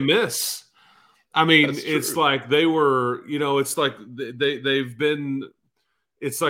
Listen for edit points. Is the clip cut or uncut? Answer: uncut